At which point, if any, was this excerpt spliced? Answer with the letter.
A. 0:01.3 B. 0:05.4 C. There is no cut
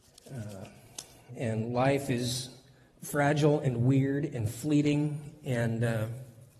A